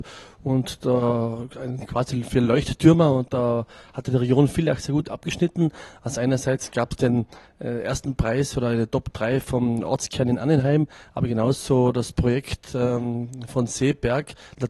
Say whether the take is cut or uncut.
uncut